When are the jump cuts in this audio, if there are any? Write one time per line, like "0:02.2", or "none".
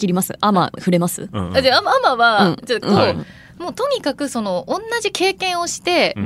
0:02.8